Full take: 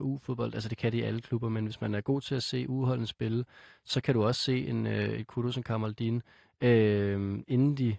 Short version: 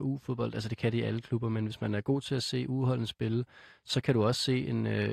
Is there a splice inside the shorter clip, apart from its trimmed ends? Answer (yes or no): no